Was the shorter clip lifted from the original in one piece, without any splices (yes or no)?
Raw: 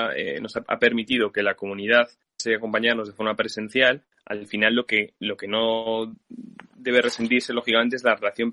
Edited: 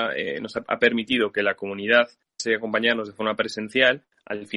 yes